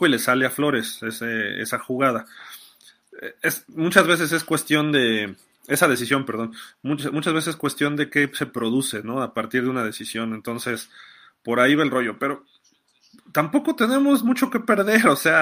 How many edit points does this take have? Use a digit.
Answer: 0